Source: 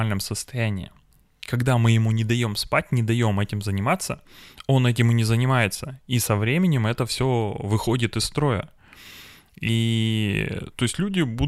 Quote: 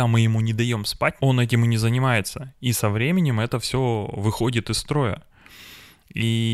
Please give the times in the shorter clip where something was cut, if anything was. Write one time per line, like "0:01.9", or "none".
0:01.2